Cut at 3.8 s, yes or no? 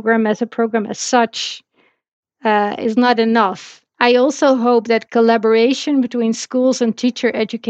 yes